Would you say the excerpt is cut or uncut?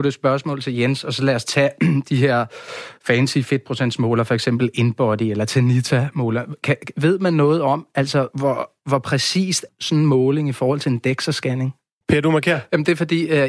cut